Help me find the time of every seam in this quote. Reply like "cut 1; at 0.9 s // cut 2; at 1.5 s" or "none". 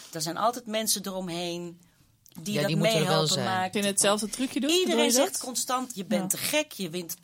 cut 1; at 3.7 s